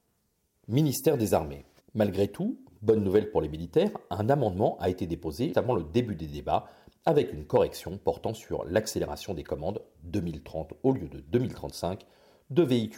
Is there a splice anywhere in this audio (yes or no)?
yes